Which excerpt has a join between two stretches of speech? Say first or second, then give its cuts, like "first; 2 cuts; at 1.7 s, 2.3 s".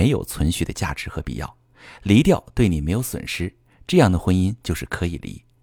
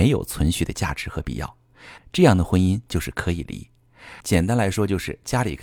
second; 2 cuts; at 2.0 s, 4.2 s